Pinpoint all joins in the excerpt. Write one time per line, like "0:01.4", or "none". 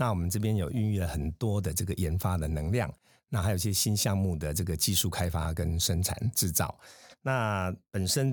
none